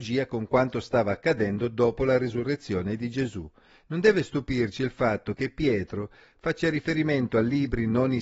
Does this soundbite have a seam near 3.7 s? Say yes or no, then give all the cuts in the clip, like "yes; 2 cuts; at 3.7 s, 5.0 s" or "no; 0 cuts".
no; 0 cuts